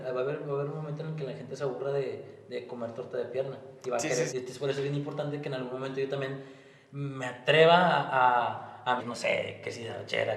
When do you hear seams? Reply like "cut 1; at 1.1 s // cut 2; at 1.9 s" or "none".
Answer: cut 1; at 4.3 s // cut 2; at 9.0 s